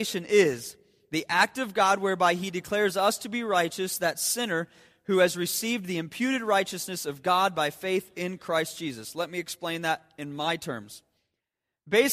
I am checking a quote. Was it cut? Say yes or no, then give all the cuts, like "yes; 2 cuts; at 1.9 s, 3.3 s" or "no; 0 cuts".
no; 0 cuts